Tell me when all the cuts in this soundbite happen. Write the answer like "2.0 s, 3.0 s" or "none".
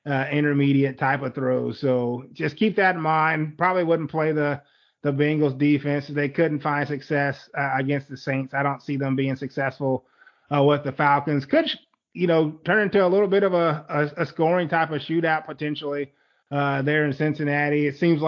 none

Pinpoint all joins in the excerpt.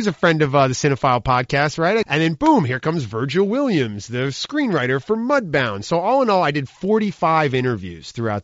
2.0 s

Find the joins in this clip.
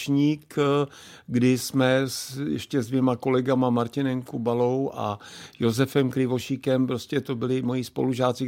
none

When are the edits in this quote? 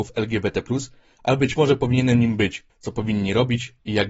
2.7 s

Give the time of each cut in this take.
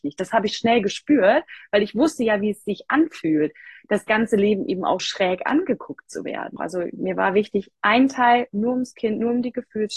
5.0 s, 6.6 s

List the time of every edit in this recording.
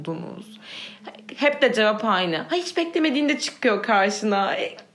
none

